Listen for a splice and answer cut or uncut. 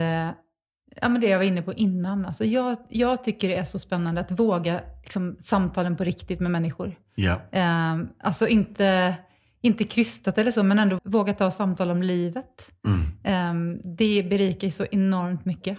cut